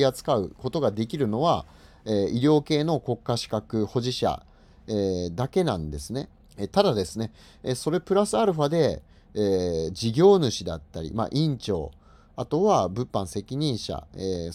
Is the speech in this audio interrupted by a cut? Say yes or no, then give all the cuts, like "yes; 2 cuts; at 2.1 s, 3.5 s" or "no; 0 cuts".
yes; 1 cut; at 6.5 s